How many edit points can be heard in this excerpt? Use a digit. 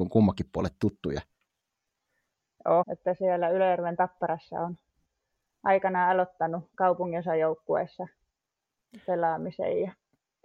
2